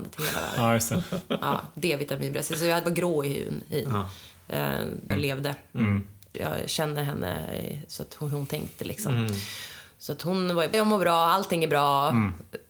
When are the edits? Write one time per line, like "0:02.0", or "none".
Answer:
0:05.1
0:06.3
0:10.7